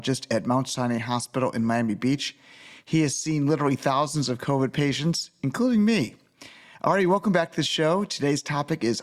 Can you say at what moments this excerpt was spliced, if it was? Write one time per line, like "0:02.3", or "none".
none